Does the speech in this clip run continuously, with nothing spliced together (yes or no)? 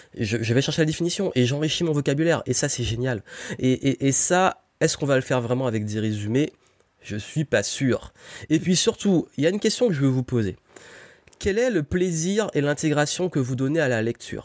yes